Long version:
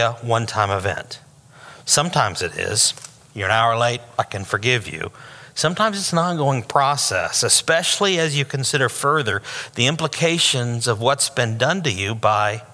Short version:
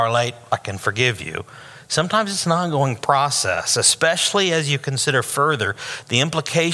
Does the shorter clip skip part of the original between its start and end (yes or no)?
no